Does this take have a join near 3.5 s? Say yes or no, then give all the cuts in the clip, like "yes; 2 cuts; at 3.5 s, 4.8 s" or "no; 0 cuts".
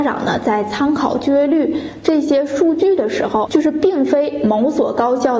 yes; 1 cut; at 3.5 s